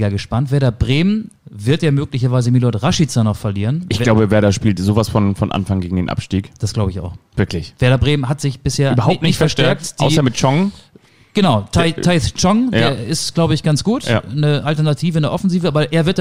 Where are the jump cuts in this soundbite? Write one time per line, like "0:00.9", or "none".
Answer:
0:01.4